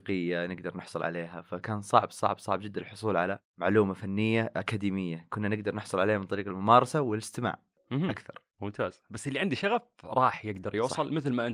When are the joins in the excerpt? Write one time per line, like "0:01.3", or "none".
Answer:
none

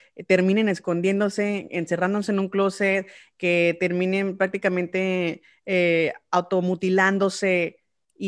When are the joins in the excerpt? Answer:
none

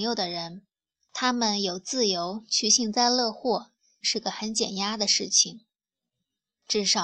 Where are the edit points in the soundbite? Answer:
0:04.0

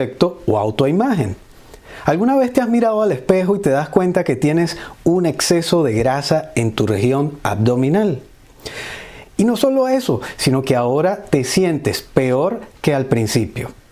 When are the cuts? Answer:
0:09.2

